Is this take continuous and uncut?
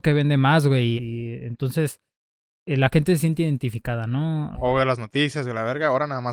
no; 2 cuts; at 1.0 s, 4.5 s

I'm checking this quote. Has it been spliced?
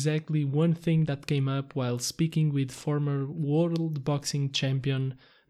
no; 0 cuts

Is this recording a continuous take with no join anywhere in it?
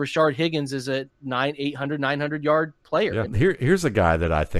no; 1 cut; at 3.3 s

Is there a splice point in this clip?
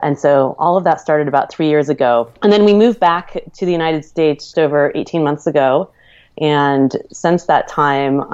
yes; 2 cuts; at 2.4 s, 4.5 s

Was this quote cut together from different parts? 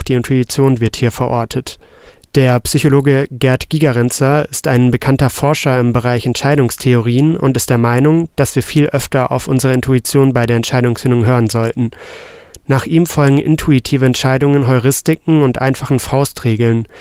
no; 0 cuts

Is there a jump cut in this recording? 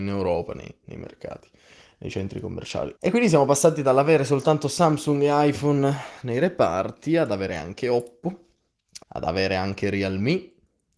yes; 2 cuts; at 3.0 s, 9.0 s

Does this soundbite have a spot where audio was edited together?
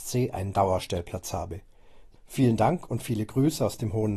yes; 1 cut; at 2.2 s

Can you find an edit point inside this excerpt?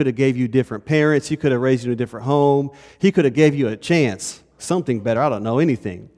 yes; 1 cut; at 4.6 s

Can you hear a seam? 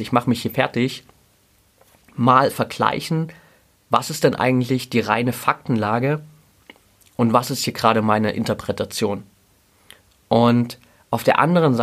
no; 0 cuts

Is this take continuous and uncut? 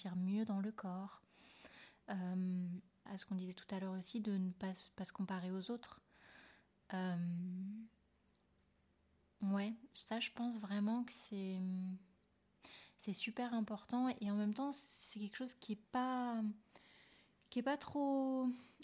no; 1 cut; at 3.1 s

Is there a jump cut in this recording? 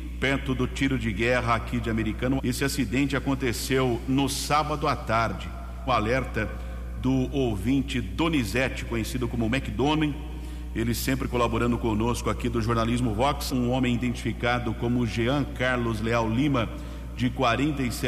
yes; 3 cuts; at 2.4 s, 5.9 s, 13.5 s

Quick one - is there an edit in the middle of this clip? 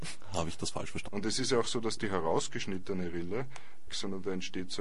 yes; 2 cuts; at 1.1 s, 3.9 s

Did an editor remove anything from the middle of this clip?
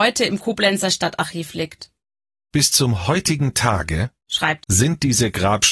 yes; 1 cut; at 4.6 s

